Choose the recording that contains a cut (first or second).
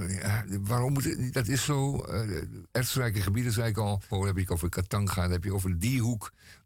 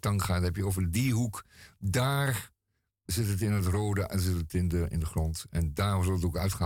first